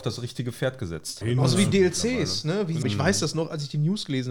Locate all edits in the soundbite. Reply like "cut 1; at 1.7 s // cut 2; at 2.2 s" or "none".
cut 1; at 1.2 s // cut 2; at 2.8 s

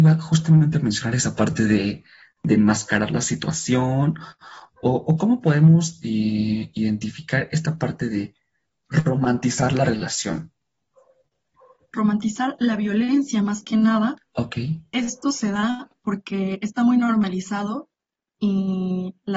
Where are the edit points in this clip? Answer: none

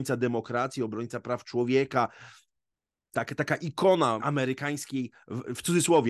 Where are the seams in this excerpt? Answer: cut 1; at 3.1 s // cut 2; at 4.2 s

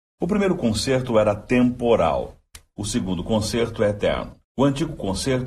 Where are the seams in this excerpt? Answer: cut 1; at 4.4 s

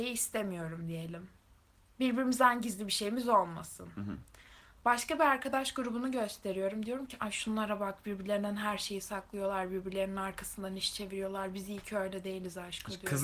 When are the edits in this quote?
none

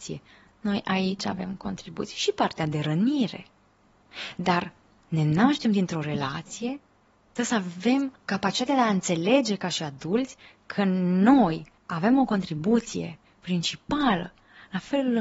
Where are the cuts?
cut 1; at 8.2 s // cut 2; at 11.8 s

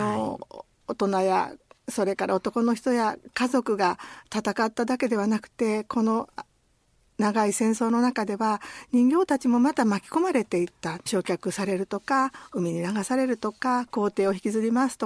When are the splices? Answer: cut 1; at 11.1 s

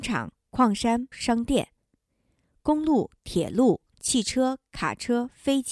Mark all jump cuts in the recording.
cut 1; at 1.1 s // cut 2; at 3.9 s

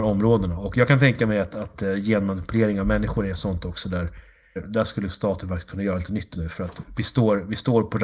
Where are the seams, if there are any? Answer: cut 1; at 4.6 s // cut 2; at 6.3 s

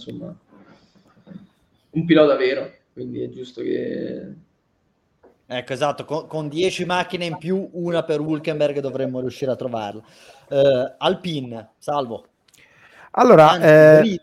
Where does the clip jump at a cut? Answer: none

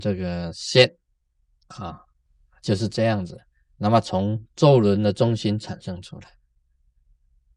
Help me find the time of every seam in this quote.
none

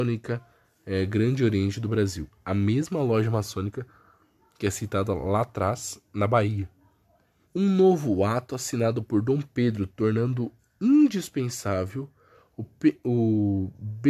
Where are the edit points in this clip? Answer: cut 1; at 7.4 s

